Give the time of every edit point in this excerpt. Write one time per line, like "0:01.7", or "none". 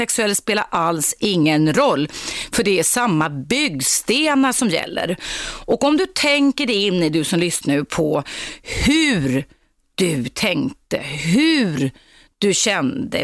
0:07.6